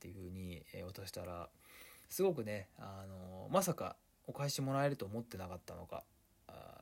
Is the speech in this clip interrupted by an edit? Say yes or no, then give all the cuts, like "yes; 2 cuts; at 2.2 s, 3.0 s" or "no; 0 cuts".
no; 0 cuts